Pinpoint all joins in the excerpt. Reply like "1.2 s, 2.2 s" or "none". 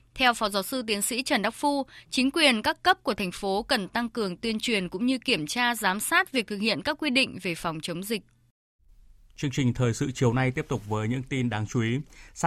none